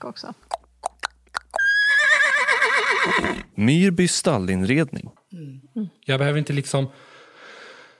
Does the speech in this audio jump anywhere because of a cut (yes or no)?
yes